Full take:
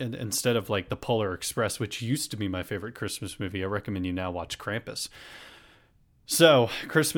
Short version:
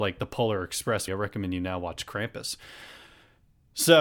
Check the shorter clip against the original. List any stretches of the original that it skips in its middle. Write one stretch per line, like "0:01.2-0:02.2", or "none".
0:01.8-0:03.6